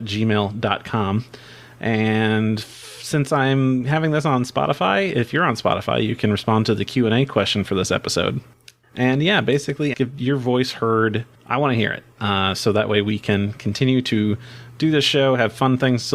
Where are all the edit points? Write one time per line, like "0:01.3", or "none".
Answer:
0:09.9